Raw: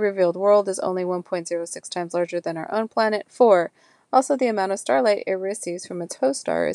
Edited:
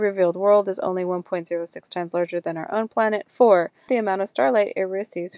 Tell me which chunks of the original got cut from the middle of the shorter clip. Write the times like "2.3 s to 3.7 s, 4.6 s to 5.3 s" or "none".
3.9 s to 4.4 s